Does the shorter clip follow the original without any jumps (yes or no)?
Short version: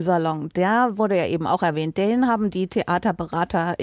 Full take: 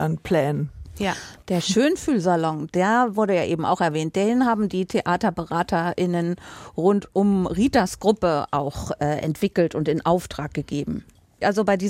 yes